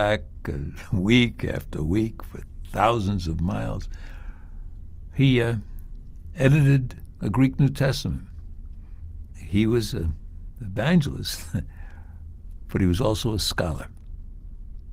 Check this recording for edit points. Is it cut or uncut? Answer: uncut